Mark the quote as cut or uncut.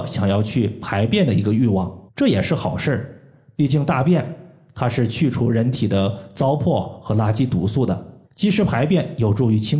cut